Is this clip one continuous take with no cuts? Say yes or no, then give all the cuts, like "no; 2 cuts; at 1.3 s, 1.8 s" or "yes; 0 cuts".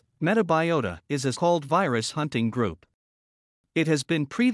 no; 1 cut; at 1.3 s